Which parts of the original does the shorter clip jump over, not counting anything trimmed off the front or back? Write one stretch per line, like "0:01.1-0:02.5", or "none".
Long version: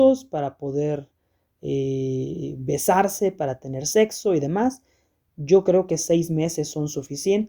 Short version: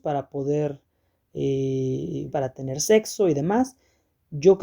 0:02.6-0:03.3